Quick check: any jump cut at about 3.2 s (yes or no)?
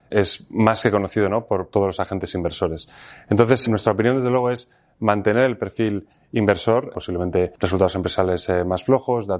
no